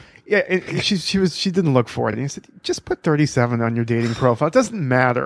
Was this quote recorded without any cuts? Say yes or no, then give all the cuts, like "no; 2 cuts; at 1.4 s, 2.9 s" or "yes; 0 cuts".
yes; 0 cuts